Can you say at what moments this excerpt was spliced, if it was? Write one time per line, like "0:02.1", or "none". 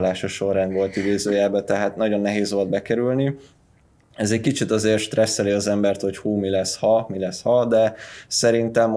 none